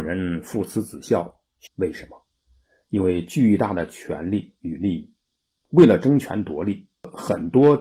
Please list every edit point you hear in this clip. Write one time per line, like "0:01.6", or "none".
0:01.7